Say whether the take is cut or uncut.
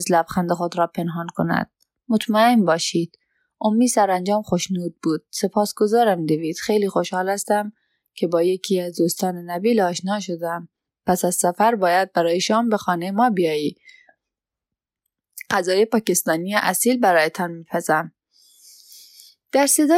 uncut